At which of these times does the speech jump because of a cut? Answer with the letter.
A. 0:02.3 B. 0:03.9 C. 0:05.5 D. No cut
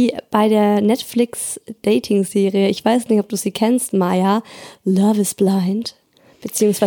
D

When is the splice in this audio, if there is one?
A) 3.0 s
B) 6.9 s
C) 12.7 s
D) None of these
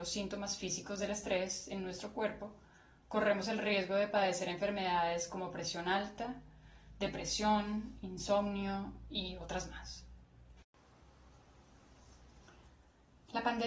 D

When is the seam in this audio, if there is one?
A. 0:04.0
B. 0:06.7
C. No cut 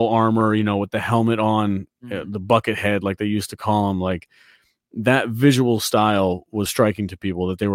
B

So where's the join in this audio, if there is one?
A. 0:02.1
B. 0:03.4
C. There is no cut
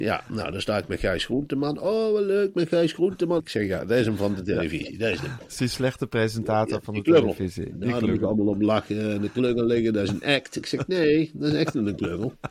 B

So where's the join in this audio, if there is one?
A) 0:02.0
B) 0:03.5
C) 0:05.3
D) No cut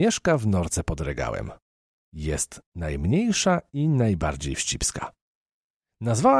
A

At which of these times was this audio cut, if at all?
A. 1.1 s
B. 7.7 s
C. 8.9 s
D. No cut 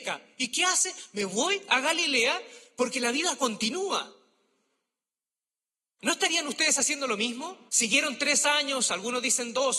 B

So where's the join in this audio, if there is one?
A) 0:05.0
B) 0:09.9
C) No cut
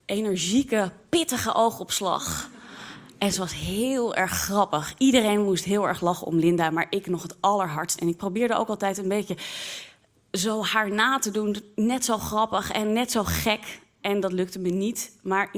C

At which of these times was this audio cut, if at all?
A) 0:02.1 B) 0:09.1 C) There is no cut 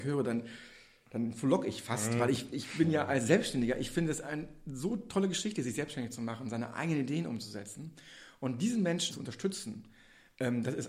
B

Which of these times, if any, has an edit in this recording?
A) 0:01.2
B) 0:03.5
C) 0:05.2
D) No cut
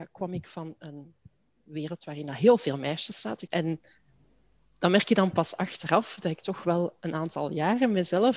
B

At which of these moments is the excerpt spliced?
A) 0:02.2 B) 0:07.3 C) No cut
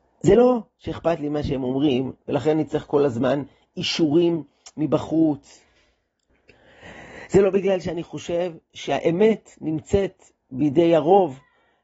A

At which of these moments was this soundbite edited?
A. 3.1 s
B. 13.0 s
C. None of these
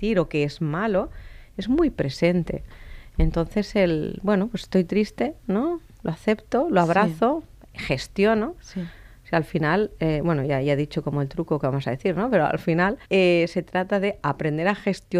B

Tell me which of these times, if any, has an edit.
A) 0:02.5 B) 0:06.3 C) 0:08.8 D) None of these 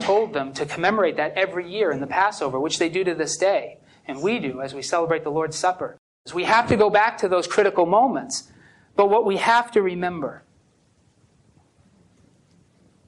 B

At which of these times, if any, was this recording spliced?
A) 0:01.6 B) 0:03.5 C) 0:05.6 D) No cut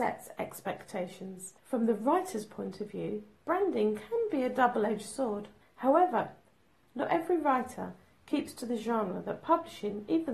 C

